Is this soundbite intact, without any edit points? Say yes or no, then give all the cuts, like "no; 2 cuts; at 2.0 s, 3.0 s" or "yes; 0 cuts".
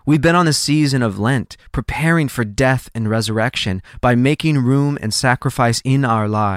yes; 0 cuts